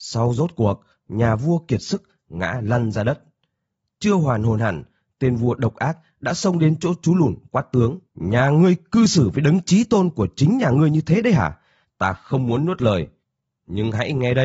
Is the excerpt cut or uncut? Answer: cut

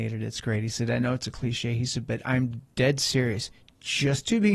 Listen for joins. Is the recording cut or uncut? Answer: uncut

